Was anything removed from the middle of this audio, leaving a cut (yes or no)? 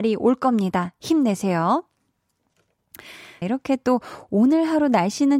yes